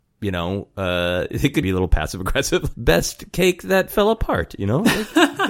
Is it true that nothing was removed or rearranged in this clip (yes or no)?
no